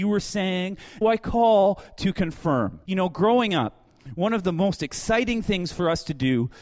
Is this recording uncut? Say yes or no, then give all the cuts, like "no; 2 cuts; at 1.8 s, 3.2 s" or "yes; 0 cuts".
no; 2 cuts; at 1.0 s, 2.9 s